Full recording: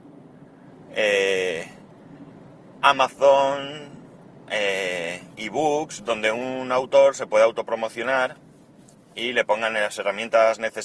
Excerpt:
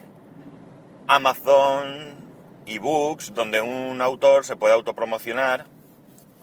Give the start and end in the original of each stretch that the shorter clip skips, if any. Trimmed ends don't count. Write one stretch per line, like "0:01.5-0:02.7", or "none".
0:04.4-0:05.4

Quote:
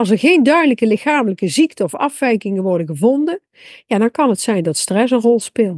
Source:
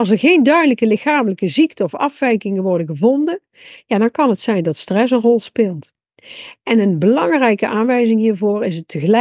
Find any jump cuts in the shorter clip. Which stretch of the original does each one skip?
none

